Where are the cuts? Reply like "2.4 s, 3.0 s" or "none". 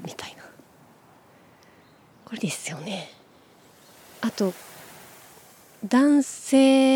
2.4 s